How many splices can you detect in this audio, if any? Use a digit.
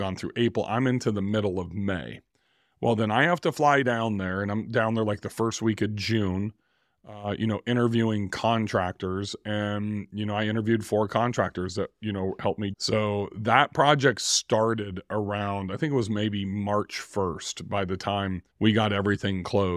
2